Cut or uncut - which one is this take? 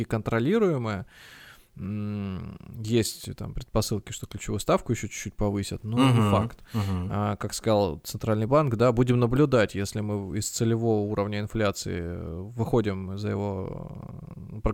uncut